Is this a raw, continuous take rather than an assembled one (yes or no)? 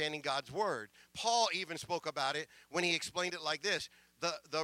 yes